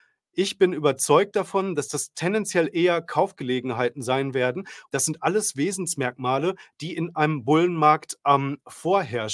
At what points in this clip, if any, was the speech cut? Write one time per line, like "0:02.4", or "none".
0:04.9